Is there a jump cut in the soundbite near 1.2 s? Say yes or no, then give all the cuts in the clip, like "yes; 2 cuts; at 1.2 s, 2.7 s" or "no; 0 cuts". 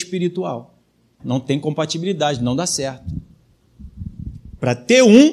yes; 1 cut; at 1.2 s